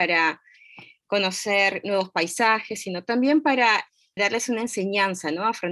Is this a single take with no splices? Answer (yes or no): no